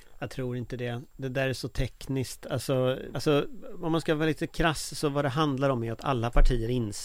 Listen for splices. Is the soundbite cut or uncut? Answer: cut